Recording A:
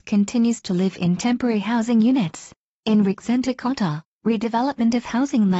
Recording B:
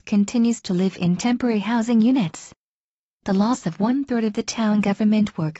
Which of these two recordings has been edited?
A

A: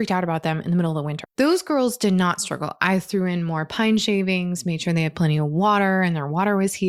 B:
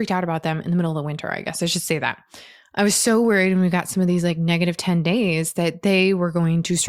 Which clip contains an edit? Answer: A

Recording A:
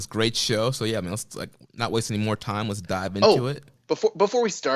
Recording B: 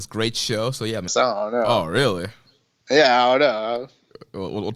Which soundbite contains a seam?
B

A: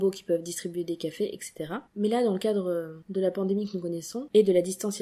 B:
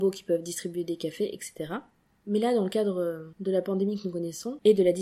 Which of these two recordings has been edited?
A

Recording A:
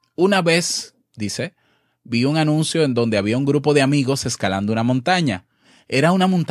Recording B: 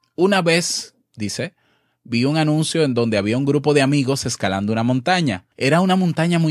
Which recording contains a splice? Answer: B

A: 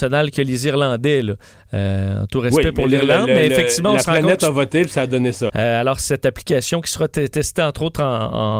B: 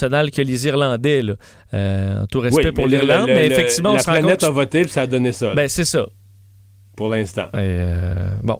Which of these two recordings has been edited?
A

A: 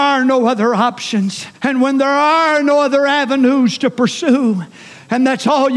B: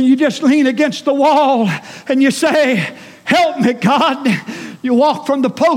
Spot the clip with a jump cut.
A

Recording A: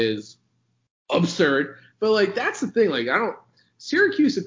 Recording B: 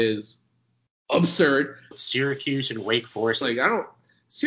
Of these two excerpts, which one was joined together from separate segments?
B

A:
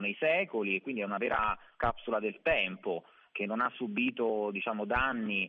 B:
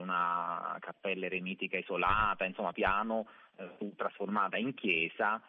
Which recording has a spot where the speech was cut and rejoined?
B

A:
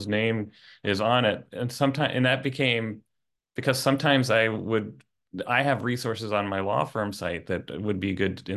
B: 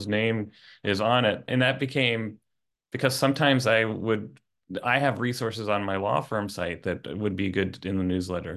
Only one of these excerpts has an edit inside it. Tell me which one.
B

